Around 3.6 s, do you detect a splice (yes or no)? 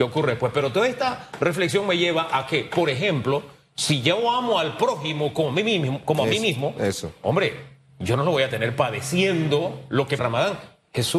no